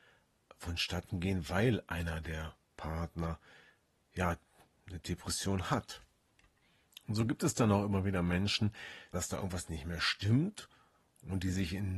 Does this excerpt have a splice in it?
yes; 2 cuts; at 2.6 s, 9.1 s

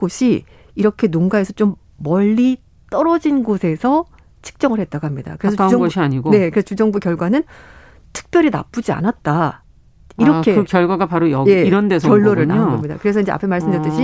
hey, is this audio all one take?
yes; 0 cuts

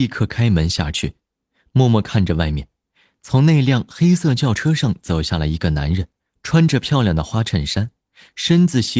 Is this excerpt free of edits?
yes; 0 cuts

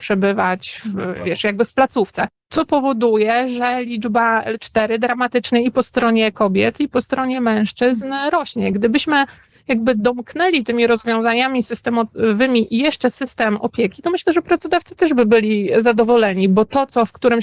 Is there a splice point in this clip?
no; 0 cuts

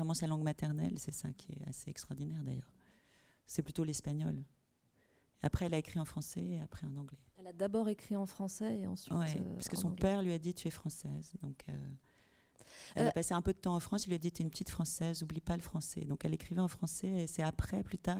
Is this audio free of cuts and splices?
yes; 0 cuts

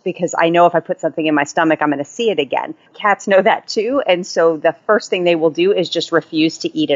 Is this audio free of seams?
yes; 0 cuts

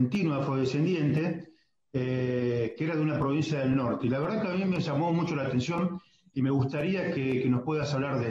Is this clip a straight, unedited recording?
yes; 0 cuts

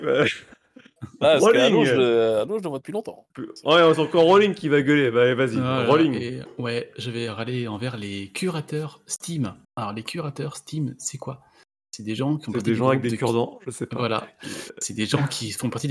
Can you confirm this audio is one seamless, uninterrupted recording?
no; 1 cut; at 9.6 s

